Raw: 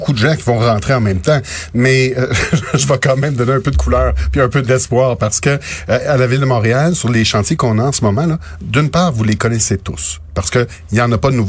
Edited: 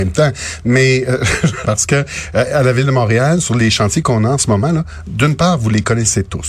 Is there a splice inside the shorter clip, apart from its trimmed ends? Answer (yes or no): yes